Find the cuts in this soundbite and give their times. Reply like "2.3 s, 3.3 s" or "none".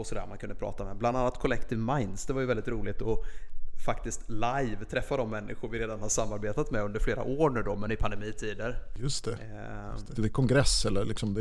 10.1 s